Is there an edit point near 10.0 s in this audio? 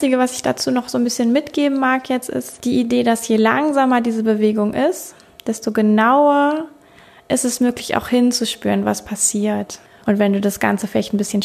yes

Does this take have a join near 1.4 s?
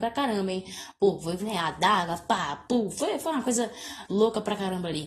yes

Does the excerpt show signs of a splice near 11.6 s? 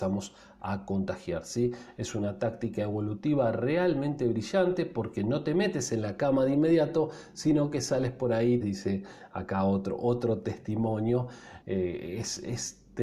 yes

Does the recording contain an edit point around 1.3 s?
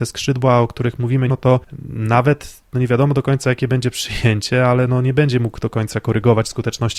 yes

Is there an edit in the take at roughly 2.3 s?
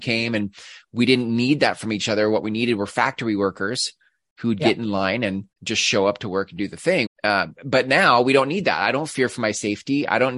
no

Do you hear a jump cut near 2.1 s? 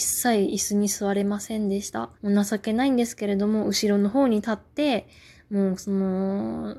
yes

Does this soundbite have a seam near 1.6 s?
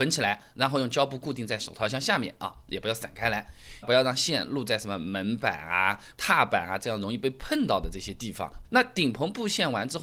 no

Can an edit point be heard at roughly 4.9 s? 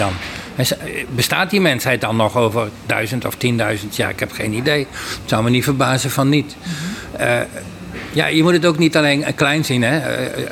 no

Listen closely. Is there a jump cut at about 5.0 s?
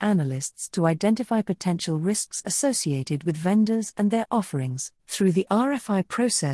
yes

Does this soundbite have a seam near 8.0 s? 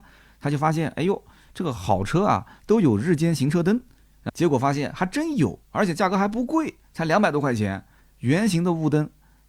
yes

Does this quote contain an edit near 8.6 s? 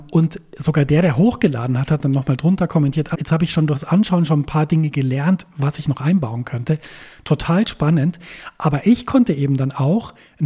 no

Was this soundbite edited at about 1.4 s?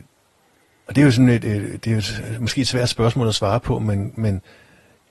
yes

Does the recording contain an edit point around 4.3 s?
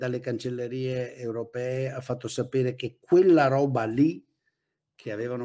no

